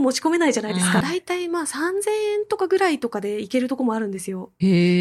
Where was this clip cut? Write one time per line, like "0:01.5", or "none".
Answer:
0:01.0